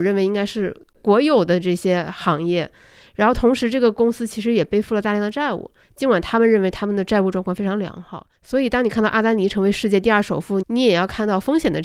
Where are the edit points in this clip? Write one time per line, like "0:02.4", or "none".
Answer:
0:08.3
0:10.6